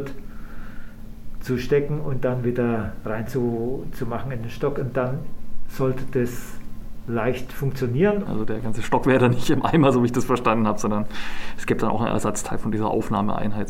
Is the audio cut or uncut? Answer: cut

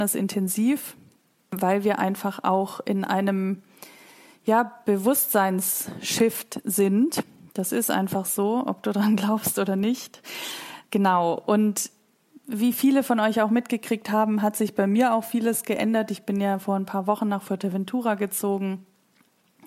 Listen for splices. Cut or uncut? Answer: uncut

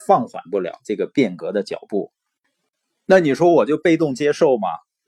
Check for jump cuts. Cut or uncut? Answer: uncut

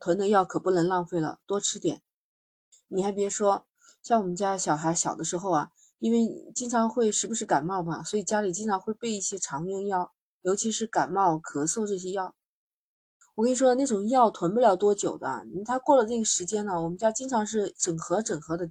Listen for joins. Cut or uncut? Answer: uncut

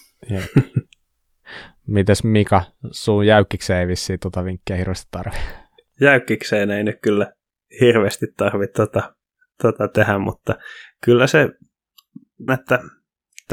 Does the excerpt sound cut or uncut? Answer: cut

